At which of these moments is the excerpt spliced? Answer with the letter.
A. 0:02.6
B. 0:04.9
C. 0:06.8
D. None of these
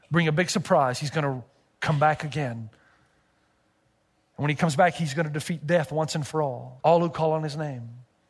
C